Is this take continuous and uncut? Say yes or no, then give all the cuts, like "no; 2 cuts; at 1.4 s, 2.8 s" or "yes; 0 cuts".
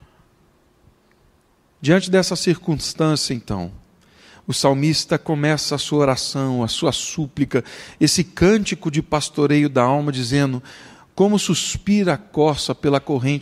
no; 1 cut; at 1.8 s